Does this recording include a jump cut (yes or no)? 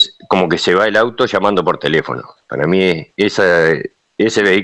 no